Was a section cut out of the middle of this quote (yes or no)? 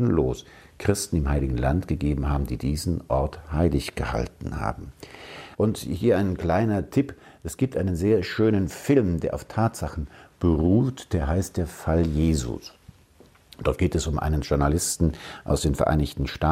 yes